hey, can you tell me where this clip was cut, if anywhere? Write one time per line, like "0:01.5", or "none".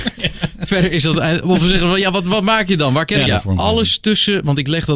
0:03.3

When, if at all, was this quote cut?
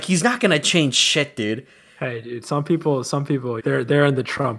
0:03.6

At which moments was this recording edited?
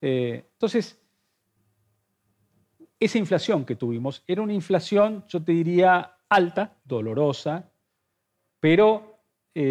0:06.8

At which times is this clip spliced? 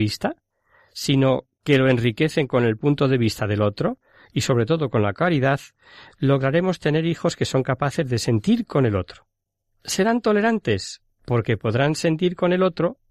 0:09.7

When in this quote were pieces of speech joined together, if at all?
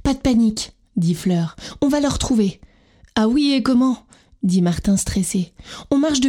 none

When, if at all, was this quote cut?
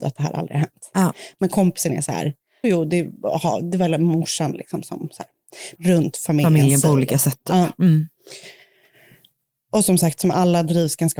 0:02.6
0:05.8

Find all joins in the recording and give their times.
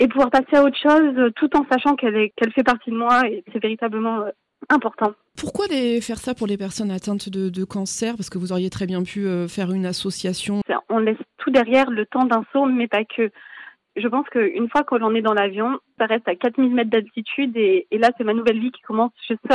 0:02.3
0:10.6
0:16.0

